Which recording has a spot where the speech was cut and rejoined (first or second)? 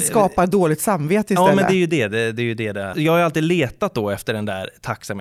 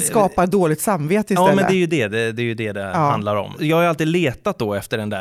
first